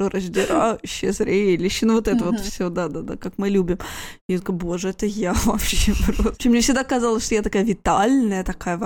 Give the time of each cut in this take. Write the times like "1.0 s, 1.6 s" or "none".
none